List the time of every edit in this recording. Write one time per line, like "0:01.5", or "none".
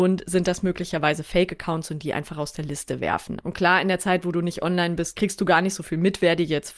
0:03.4